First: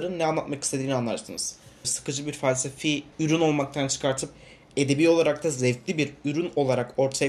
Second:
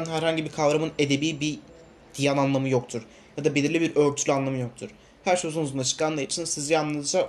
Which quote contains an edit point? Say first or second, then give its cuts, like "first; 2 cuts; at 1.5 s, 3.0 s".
first; 2 cuts; at 1.8 s, 3.1 s